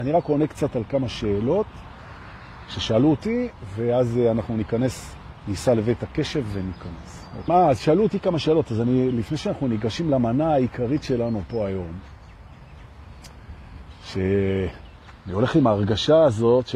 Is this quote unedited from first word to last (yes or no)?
no